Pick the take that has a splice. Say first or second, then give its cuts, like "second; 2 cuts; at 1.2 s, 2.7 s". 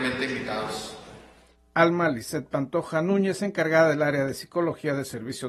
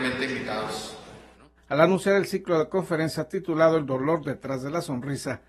second; 1 cut; at 1.3 s